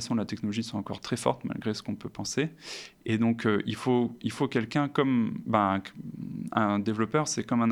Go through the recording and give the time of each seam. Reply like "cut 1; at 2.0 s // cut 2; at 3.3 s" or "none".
none